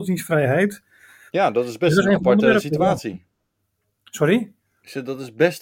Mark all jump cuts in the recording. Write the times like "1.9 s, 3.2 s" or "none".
1.3 s